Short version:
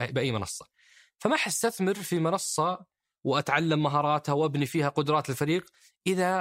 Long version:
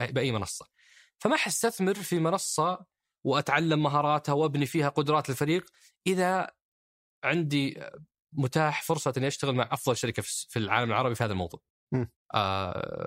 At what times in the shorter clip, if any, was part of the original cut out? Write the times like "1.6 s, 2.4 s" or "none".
none